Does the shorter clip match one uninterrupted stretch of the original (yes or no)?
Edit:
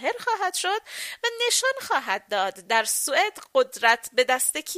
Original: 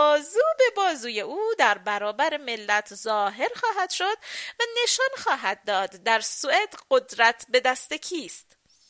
yes